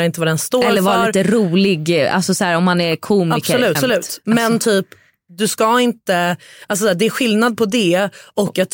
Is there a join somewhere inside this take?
yes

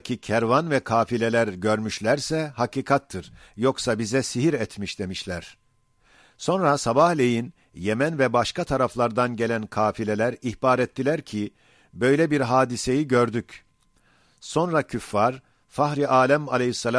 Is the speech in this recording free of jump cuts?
yes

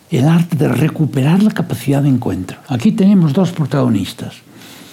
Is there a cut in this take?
no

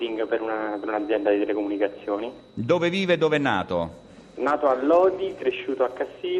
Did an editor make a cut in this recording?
no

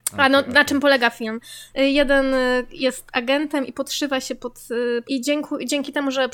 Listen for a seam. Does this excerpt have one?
yes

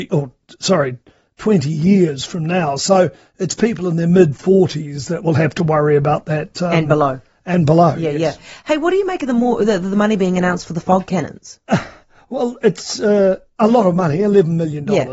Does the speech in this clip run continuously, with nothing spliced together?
yes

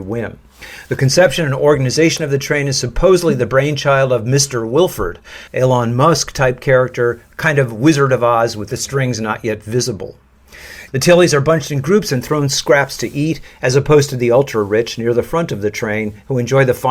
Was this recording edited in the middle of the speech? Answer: yes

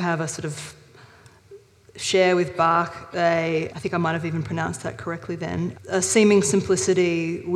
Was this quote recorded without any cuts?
no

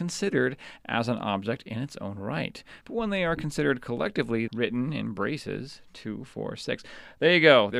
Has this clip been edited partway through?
yes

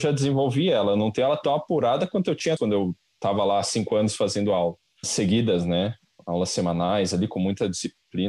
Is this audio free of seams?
no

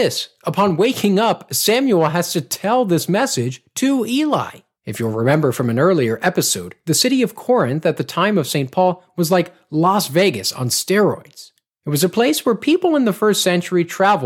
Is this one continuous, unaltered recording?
no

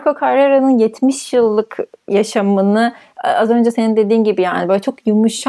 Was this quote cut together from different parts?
no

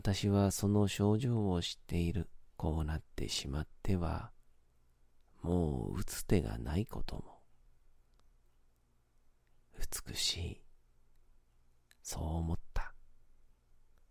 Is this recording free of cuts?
no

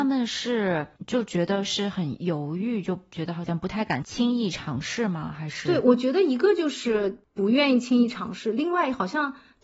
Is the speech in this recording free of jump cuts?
yes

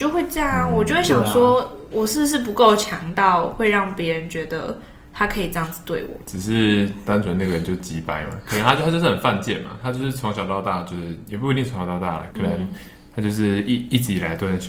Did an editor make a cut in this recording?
yes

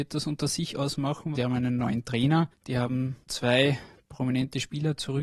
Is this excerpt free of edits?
no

